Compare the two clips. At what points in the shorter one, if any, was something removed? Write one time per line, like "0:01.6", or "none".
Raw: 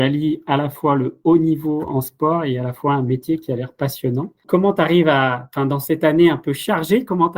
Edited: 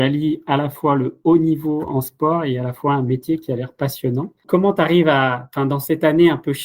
none